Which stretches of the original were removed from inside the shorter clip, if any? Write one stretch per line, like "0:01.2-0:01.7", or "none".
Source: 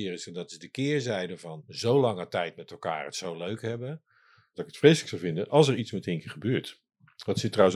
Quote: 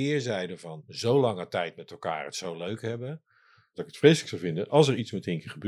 none